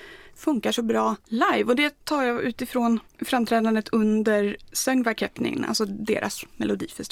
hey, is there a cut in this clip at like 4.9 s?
no; 1 cut; at 2.0 s

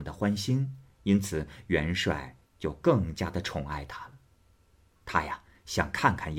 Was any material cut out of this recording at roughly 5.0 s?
yes; 1 cut; at 5.0 s

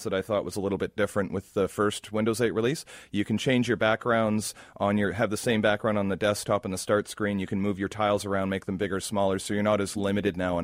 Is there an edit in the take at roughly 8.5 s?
no; 0 cuts

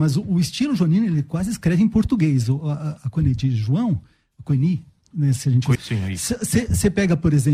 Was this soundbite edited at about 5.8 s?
yes; 1 cut; at 5.8 s

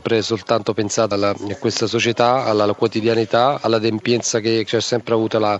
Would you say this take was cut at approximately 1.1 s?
yes; 1 cut; at 1.1 s

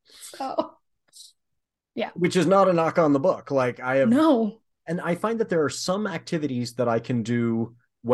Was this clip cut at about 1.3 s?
no; 0 cuts

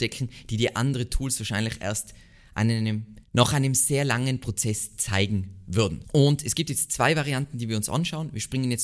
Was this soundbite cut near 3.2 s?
yes; 2 cuts; at 3.2 s, 6.0 s

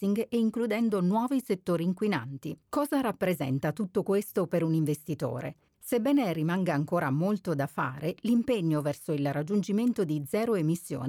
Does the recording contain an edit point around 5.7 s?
yes; 2 cuts; at 2.6 s, 5.7 s

